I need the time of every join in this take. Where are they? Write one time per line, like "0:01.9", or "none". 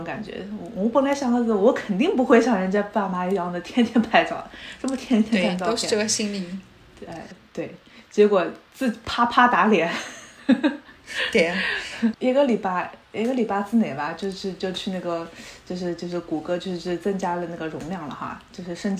none